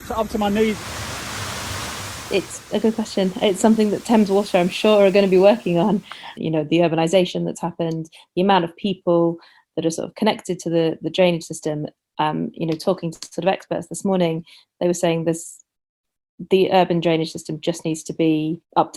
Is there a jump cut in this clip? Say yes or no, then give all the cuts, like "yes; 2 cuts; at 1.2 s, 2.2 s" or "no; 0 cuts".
yes; 1 cut; at 6.4 s